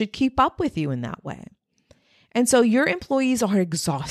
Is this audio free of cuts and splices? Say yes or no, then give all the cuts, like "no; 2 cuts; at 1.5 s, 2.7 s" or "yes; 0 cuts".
yes; 0 cuts